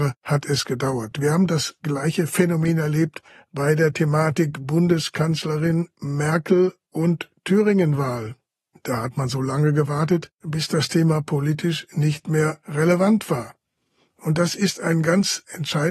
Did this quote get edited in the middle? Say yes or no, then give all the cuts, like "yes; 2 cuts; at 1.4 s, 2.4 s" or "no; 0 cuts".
no; 0 cuts